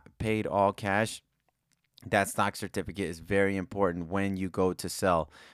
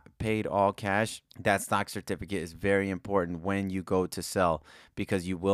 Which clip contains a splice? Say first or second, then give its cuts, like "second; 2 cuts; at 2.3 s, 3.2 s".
second; 1 cut; at 1.3 s